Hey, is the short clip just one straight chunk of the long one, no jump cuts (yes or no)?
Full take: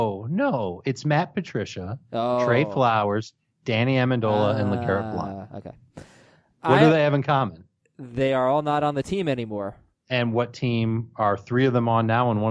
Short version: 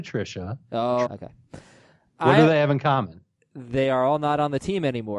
no